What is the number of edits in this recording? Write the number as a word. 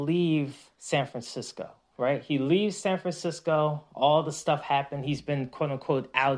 zero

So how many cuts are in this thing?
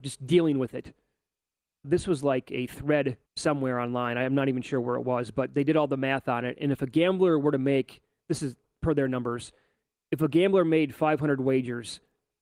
two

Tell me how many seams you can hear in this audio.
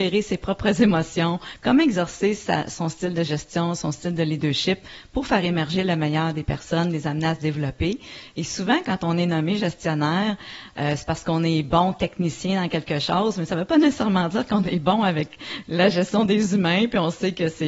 zero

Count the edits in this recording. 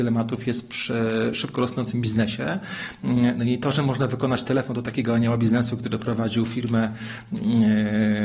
zero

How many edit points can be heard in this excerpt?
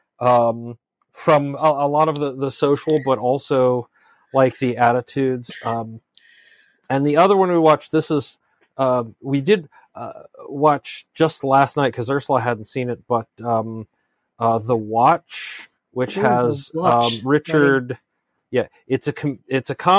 zero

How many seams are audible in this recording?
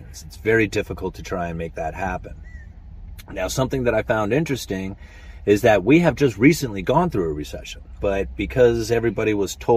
one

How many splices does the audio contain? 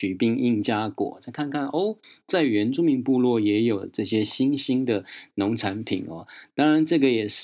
zero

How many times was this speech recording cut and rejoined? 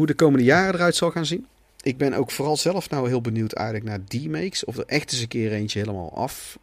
zero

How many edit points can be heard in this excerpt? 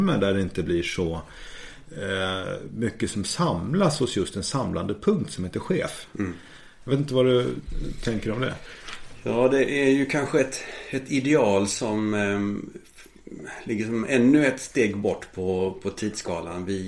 zero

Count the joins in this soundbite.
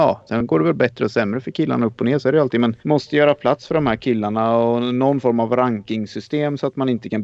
one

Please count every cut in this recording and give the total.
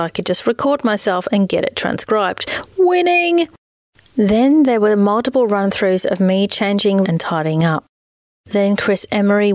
one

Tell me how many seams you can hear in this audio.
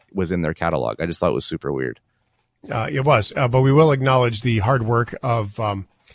zero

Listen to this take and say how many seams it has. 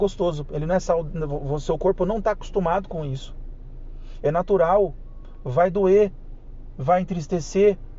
one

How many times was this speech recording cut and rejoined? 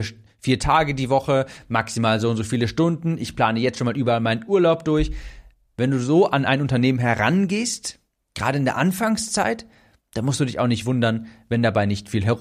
zero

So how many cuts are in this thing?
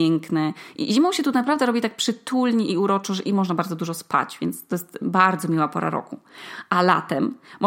zero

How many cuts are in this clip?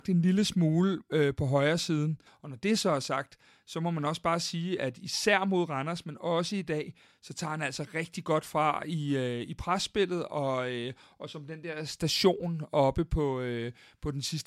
one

